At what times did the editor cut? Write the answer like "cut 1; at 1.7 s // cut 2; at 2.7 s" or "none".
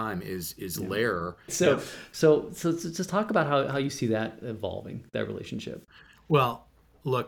cut 1; at 1.5 s